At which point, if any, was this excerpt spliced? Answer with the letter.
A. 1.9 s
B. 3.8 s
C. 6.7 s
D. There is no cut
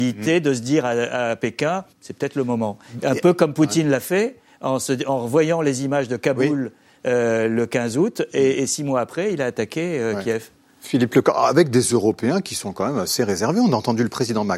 A